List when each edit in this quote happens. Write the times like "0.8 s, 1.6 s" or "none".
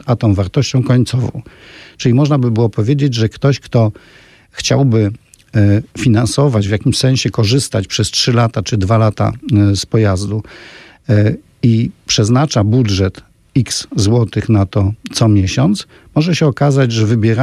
none